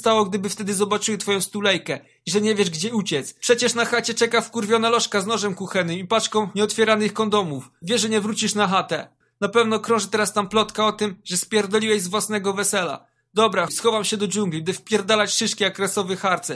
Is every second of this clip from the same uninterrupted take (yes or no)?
no